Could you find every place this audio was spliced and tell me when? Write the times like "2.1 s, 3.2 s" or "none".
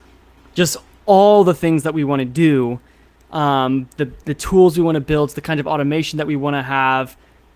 none